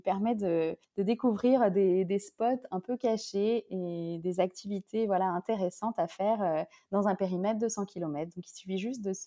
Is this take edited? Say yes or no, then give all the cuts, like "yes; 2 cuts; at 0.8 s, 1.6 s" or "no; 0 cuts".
no; 0 cuts